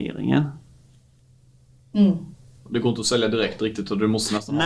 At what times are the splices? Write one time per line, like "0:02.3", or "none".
none

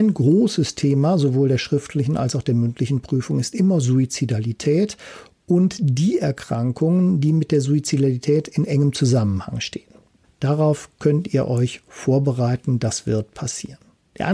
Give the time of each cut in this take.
none

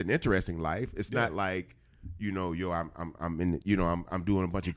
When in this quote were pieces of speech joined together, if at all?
none

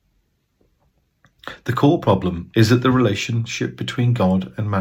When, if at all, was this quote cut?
0:02.5

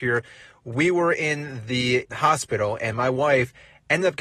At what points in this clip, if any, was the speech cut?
0:02.1

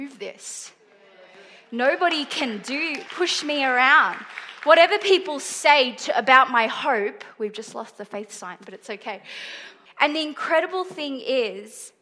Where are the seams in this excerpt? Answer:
0:03.1
0:09.9

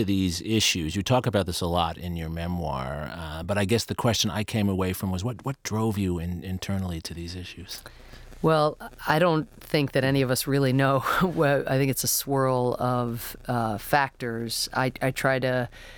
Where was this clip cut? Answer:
none

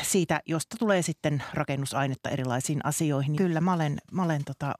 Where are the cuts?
0:03.4

